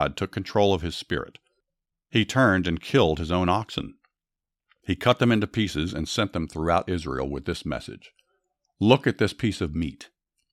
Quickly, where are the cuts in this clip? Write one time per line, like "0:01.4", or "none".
none